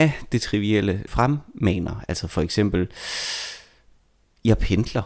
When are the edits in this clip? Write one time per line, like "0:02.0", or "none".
0:01.1